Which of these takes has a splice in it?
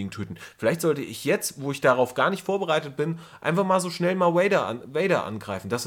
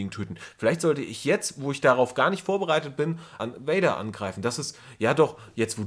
second; 1 cut; at 3.4 s

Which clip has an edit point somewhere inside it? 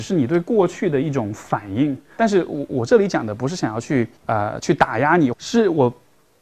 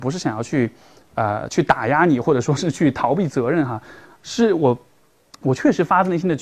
first; 3 cuts; at 2.2 s, 4.2 s, 5.3 s

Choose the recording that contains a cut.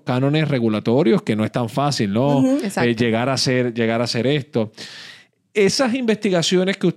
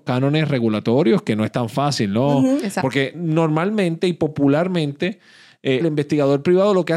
second; 2 cuts; at 2.8 s, 5.8 s

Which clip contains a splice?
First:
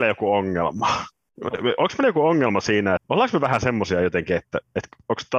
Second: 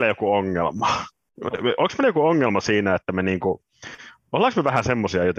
first; 1 cut; at 3.0 s

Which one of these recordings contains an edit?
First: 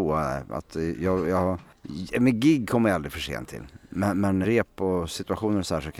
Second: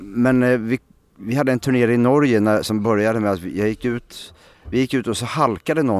first; 1 cut; at 4.4 s

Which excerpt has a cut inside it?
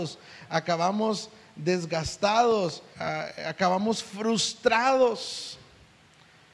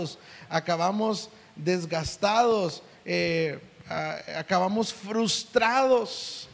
first; 1 cut; at 2.9 s

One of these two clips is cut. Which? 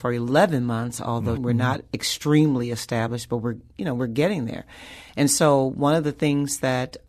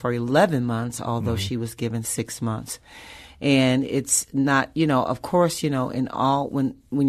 first; 1 cut; at 1.4 s

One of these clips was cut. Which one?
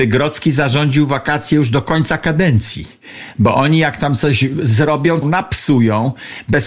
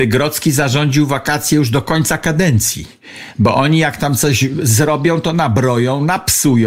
first; 1 cut; at 5.2 s

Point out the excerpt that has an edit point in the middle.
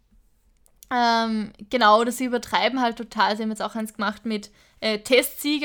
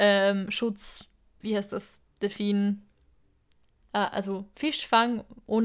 second; 1 cut; at 1.4 s

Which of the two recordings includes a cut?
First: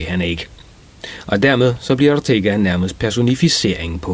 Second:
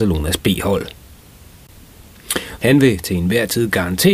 second; 1 cut; at 2.6 s

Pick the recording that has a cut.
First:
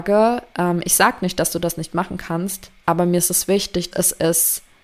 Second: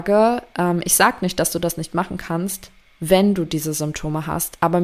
first; 2 cuts; at 2.8 s, 3.9 s

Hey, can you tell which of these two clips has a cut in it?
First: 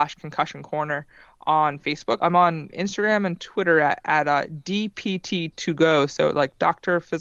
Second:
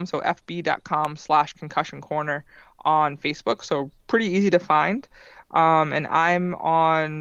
first; 1 cut; at 2.2 s

